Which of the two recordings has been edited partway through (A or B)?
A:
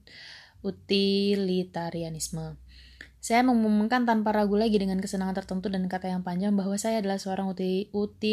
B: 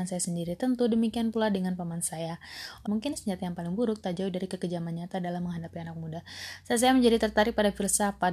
B